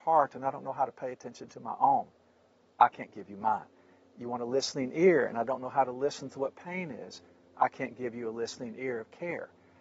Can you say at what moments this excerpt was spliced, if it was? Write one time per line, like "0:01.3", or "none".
none